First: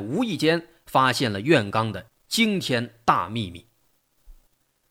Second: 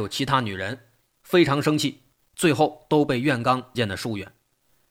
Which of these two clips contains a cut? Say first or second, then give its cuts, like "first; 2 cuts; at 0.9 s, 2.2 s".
second; 1 cut; at 3.7 s